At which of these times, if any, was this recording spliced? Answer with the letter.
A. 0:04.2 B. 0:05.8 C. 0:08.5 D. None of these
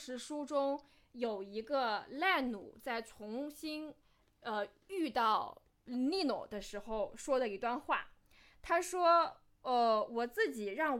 D